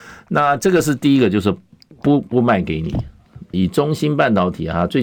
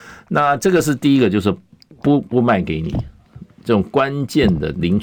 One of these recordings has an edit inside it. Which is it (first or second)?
first